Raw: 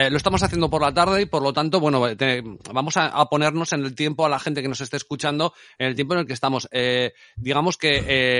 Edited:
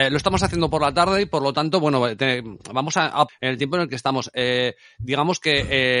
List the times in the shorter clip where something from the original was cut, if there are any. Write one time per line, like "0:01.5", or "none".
0:03.3